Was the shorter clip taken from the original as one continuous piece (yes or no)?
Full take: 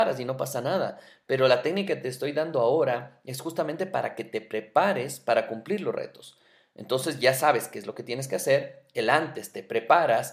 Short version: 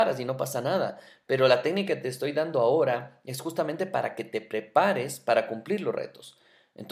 yes